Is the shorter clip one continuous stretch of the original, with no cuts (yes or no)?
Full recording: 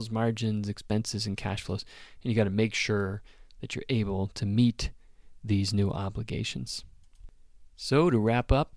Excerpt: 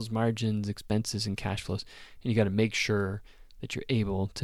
yes